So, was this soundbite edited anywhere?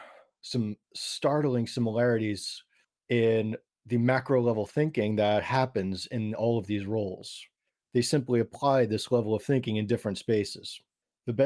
no; 0 cuts

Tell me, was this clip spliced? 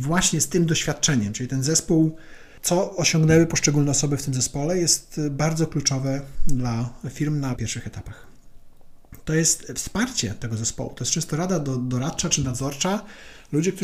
yes; 1 cut; at 7.6 s

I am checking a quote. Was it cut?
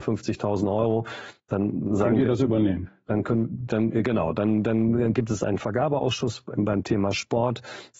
no; 0 cuts

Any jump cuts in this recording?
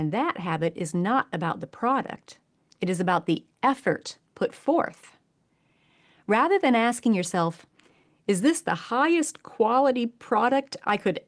yes; 1 cut; at 2.7 s

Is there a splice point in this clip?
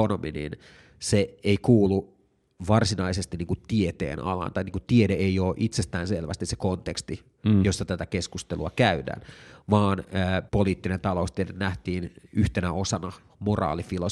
yes; 1 cut; at 10.5 s

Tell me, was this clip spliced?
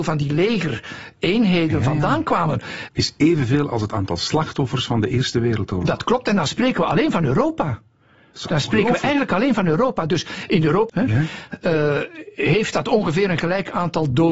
yes; 2 cuts; at 2.9 s, 10.9 s

